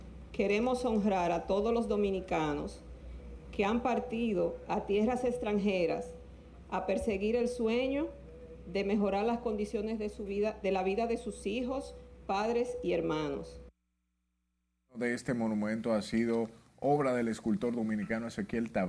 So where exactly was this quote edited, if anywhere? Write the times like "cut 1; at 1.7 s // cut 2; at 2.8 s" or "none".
none